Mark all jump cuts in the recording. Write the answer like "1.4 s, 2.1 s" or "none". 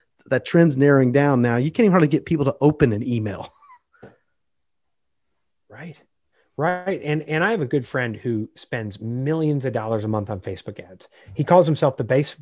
none